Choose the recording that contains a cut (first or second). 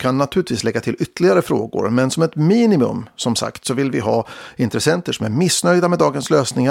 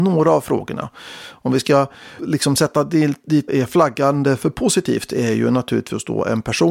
second